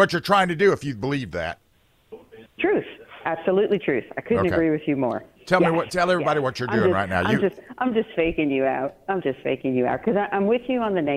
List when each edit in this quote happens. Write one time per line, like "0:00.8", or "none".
none

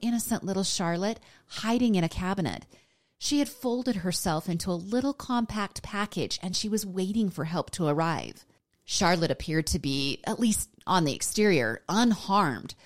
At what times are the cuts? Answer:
none

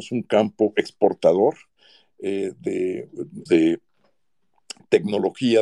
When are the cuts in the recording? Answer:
0:03.5

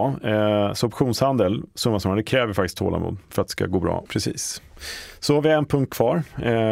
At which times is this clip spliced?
0:04.1

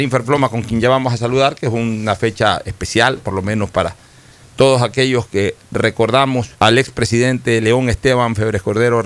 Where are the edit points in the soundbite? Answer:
0:06.5

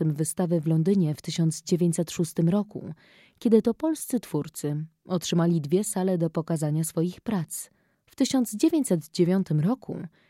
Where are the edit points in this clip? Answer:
0:07.9

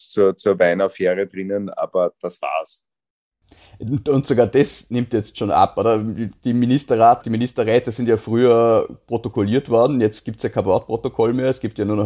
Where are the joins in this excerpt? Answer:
0:07.2

